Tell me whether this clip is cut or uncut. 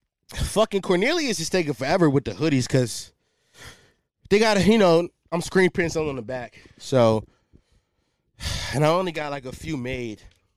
uncut